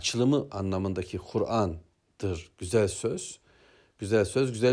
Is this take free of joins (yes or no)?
yes